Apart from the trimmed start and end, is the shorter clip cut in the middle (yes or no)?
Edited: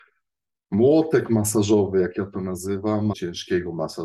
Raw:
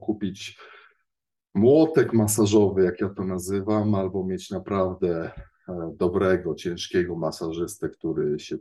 yes